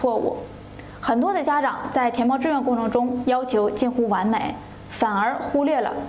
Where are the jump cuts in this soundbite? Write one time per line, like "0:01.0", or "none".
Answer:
0:03.2